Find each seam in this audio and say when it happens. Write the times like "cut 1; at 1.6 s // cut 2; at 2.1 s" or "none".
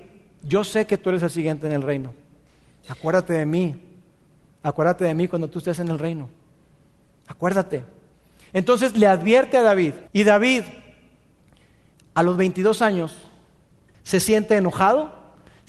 cut 1; at 10.1 s // cut 2; at 13.9 s